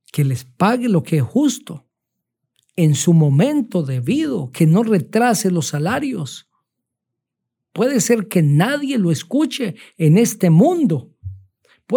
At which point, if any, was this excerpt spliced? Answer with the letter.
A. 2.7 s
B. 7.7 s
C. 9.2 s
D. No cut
B